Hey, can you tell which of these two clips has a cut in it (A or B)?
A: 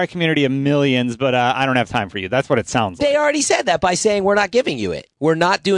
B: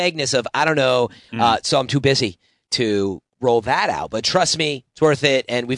B